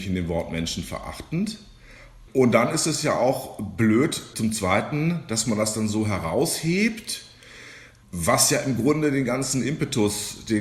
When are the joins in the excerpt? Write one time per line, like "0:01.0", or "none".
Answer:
0:04.3